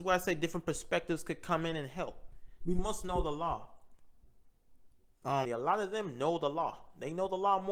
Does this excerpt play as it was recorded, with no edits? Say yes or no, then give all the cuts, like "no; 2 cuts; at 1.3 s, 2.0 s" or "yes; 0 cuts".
no; 2 cuts; at 2.6 s, 5.4 s